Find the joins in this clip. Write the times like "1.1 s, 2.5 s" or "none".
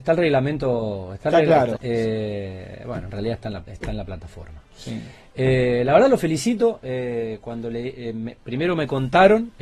1.8 s

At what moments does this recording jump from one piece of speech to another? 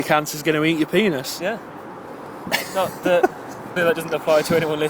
3.8 s

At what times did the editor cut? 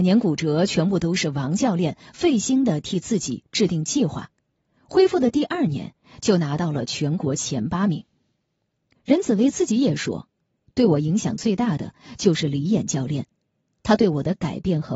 8.9 s

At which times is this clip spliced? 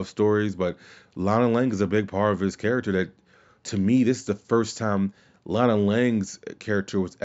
none

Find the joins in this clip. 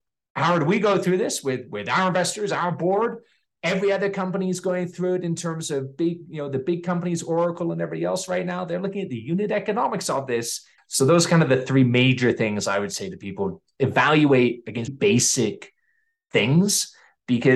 10.8 s, 14.9 s

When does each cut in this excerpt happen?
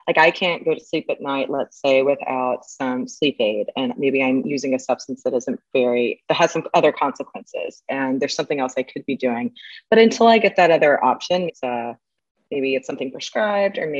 11.5 s

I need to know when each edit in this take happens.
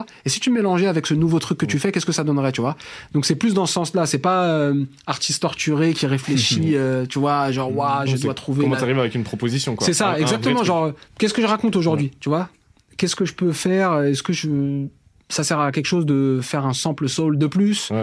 none

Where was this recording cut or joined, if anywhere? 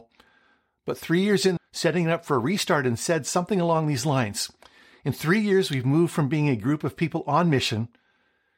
1.6 s

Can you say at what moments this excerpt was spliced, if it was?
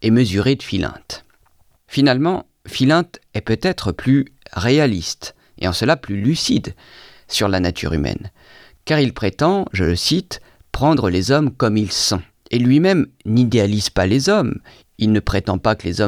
none

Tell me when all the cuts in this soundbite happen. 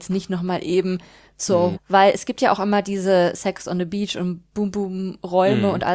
1.7 s

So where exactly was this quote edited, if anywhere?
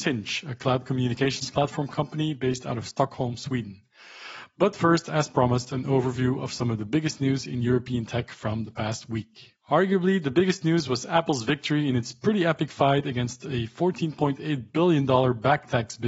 9.6 s

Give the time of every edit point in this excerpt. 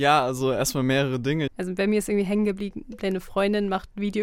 1.5 s

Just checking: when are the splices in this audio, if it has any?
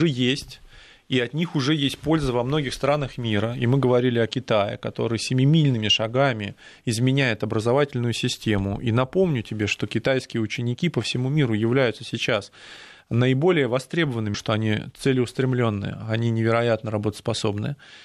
14.3 s

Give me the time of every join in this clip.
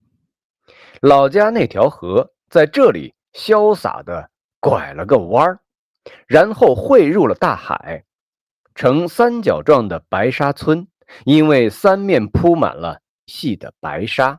13.3 s

